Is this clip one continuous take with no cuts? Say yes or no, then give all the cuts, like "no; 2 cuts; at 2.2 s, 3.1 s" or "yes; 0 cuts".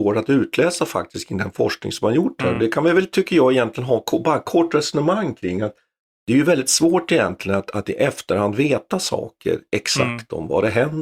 yes; 0 cuts